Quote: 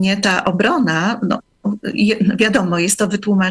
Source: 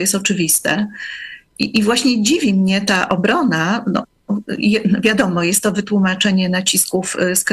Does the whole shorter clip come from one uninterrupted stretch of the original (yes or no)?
yes